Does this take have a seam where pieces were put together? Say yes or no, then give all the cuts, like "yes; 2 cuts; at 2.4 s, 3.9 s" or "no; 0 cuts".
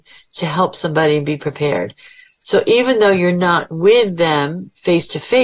yes; 1 cut; at 2.4 s